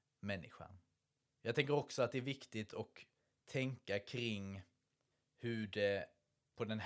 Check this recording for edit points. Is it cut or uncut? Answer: cut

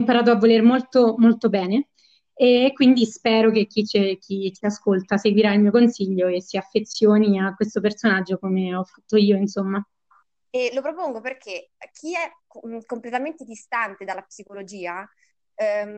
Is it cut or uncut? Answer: cut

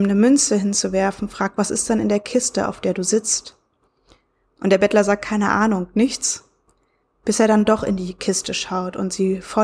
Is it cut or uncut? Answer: uncut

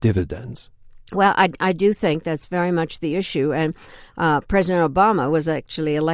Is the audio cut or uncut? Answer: uncut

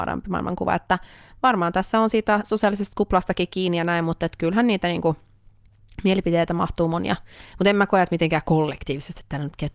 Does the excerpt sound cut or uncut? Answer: uncut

